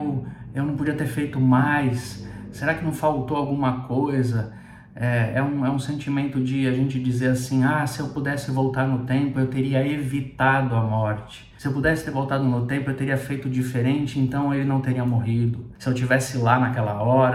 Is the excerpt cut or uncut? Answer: uncut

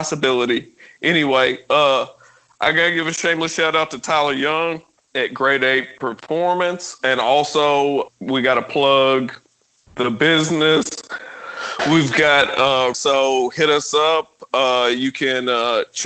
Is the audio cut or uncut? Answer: cut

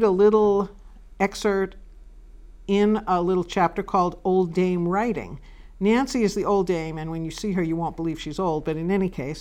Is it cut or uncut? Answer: uncut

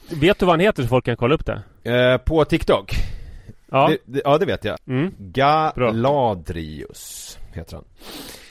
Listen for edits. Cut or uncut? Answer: cut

